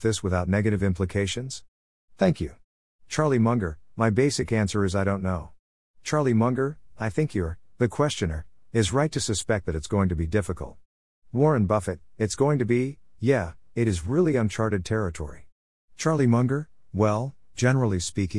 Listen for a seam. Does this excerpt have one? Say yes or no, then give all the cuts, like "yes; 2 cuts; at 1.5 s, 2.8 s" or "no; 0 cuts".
no; 0 cuts